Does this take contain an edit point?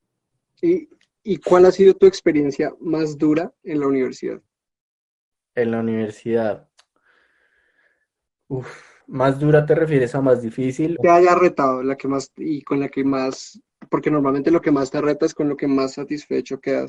yes; 2 cuts; at 9.0 s, 11.0 s

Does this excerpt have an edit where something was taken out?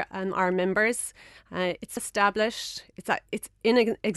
yes; 1 cut; at 2.0 s

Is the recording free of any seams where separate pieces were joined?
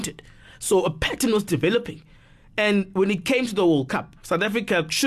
yes; 0 cuts

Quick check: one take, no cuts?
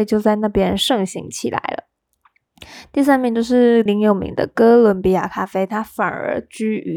no; 1 cut; at 3.9 s

